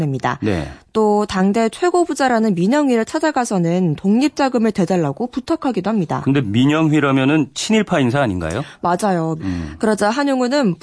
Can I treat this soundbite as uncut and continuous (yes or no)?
no